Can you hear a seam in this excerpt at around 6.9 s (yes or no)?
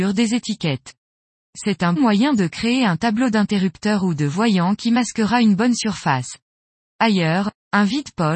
no